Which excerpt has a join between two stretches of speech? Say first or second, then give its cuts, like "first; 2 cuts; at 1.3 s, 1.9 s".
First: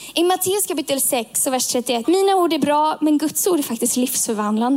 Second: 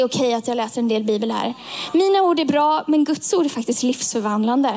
first; 1 cut; at 2.0 s